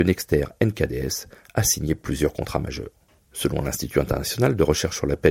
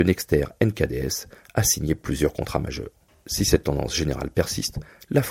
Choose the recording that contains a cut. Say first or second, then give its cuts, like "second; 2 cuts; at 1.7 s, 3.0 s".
first; 1 cut; at 3.2 s